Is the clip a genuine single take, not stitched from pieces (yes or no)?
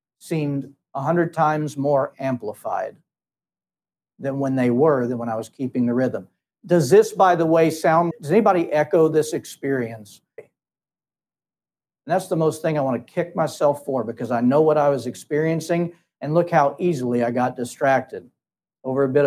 no